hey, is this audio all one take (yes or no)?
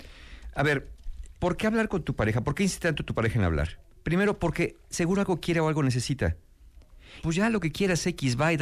no